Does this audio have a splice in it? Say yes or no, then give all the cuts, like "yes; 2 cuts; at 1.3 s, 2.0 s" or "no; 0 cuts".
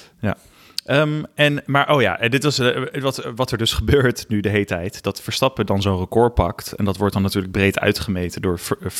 no; 0 cuts